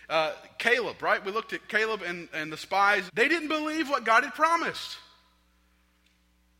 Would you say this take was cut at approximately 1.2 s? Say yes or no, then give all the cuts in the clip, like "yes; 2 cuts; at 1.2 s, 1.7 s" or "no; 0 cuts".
no; 1 cut; at 3.1 s